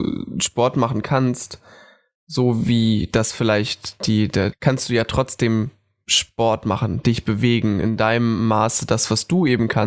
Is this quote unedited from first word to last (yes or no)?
no